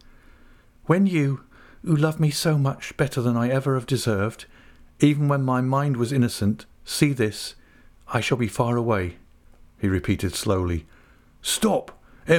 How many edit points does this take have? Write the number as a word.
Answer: one